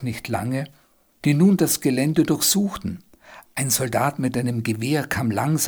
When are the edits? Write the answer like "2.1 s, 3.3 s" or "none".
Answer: 1.2 s